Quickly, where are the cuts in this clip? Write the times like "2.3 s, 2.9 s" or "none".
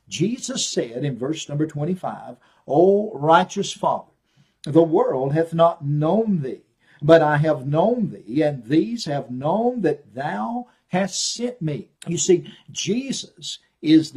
12.0 s